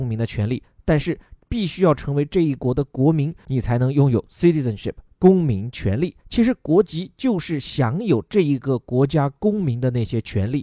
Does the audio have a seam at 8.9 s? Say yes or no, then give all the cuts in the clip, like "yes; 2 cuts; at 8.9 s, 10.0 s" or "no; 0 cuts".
no; 2 cuts; at 3.5 s, 6.2 s